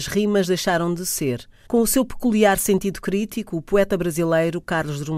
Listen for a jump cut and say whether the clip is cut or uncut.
cut